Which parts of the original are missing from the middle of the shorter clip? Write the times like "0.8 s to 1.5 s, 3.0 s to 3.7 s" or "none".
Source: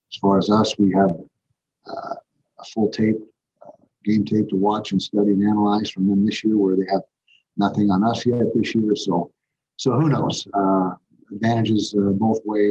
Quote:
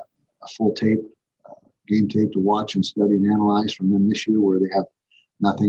none

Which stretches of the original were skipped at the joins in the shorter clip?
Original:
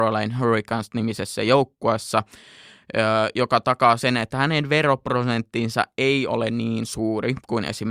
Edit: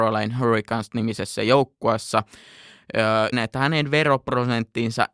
3.3 s to 4.1 s

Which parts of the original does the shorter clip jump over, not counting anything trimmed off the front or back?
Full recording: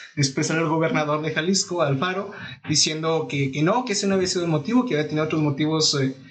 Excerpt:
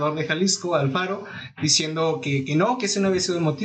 none

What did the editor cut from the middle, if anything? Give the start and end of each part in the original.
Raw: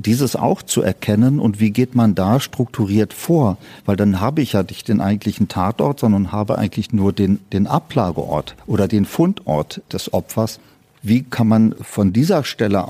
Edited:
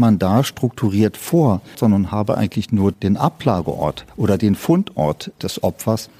3.7 s to 6.0 s, 7.1 s to 7.4 s

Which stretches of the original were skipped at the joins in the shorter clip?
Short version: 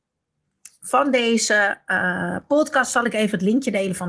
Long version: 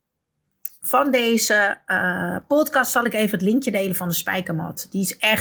none

